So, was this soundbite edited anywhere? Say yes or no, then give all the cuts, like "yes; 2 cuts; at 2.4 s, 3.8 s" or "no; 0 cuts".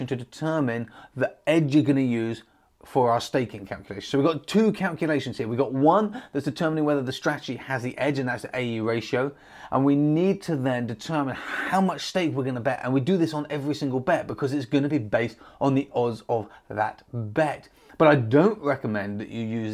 no; 0 cuts